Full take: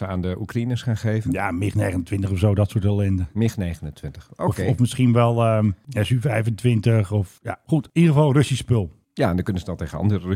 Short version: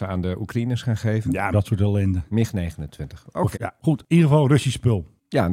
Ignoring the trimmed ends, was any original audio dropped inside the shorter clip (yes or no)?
yes